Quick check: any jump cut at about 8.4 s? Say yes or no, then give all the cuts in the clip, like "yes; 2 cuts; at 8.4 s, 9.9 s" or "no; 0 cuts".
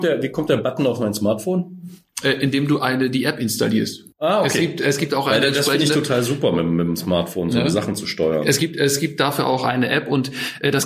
no; 1 cut; at 4.1 s